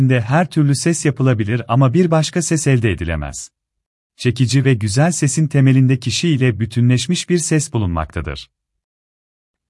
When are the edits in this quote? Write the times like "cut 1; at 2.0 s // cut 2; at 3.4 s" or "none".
cut 1; at 4.1 s